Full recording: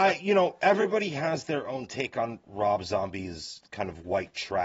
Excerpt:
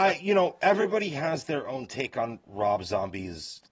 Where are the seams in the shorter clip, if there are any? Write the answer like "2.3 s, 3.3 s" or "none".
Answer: none